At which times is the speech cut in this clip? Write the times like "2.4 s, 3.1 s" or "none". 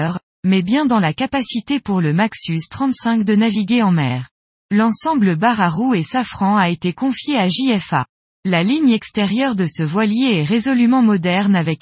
4.6 s, 8.3 s